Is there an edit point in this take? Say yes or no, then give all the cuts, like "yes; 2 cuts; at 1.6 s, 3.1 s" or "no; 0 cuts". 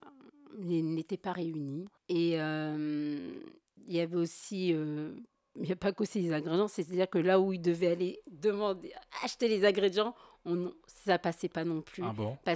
yes; 1 cut; at 2.0 s